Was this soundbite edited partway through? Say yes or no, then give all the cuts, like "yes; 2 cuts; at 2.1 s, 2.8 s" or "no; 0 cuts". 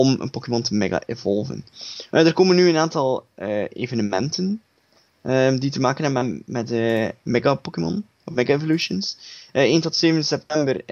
no; 0 cuts